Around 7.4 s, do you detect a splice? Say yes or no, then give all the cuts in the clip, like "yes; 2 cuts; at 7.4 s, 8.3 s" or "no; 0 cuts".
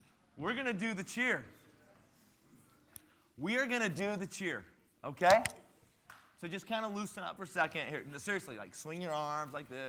yes; 1 cut; at 7.4 s